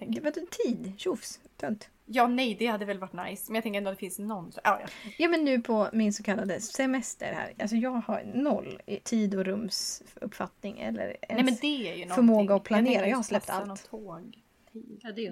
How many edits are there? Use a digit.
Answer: 1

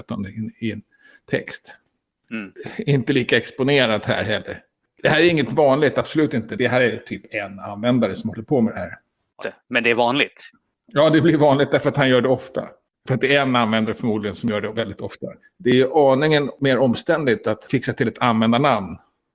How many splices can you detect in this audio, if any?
3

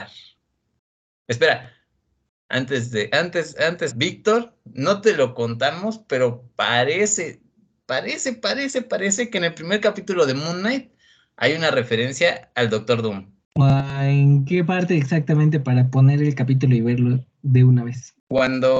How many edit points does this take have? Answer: 1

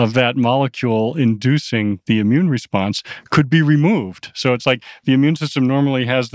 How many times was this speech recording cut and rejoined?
0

